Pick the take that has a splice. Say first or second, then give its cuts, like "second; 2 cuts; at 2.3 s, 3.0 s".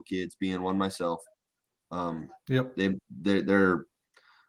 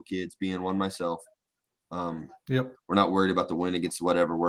second; 1 cut; at 2.7 s